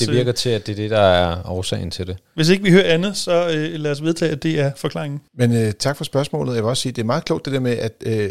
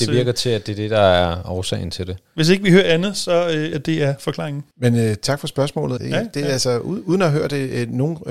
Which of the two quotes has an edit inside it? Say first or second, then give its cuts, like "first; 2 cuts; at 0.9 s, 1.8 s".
second; 2 cuts; at 3.7 s, 6.0 s